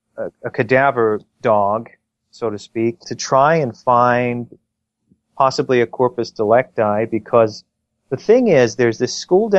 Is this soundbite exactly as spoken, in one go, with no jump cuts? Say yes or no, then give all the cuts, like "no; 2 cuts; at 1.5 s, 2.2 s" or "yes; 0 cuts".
no; 1 cut; at 3.0 s